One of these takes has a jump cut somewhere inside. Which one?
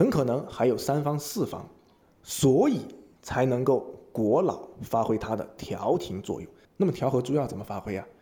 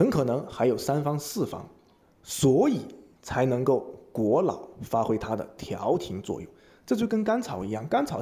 first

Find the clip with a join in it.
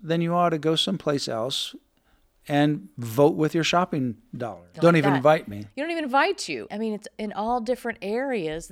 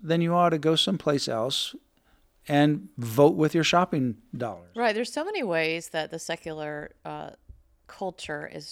first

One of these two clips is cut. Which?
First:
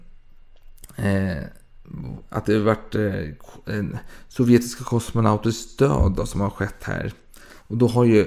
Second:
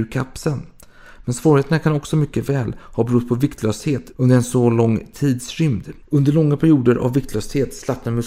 second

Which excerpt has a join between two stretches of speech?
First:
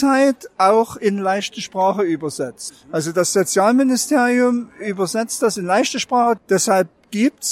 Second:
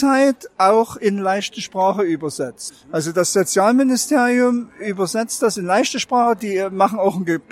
first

